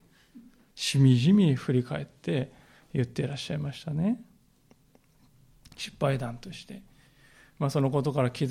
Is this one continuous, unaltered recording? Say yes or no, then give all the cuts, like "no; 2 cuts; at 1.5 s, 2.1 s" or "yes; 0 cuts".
yes; 0 cuts